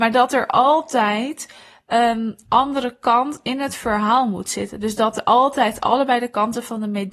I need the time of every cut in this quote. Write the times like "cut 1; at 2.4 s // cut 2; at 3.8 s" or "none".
none